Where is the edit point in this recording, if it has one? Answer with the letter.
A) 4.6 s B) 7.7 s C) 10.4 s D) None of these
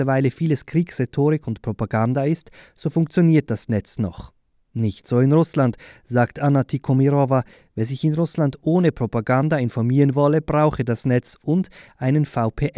D